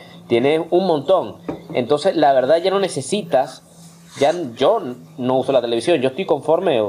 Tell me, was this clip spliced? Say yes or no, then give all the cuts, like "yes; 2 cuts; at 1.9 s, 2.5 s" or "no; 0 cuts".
no; 0 cuts